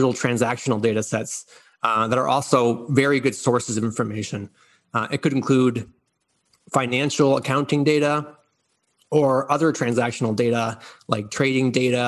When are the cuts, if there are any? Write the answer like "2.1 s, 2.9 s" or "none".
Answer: none